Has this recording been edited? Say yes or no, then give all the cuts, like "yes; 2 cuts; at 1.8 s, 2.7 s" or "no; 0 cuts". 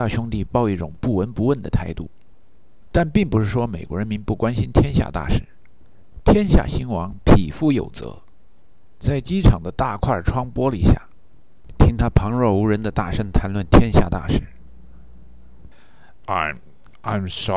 yes; 2 cuts; at 11.7 s, 16.2 s